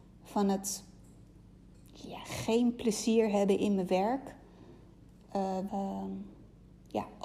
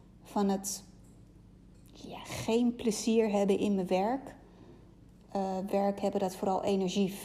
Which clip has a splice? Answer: first; 1 cut; at 5.7 s

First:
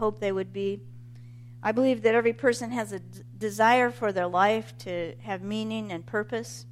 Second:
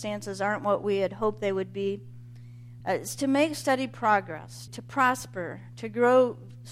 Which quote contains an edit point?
second; 2 cuts; at 2.8 s, 4.7 s

